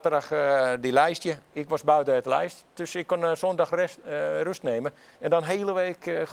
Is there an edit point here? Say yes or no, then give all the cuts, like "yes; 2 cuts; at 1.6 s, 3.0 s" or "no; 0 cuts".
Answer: no; 0 cuts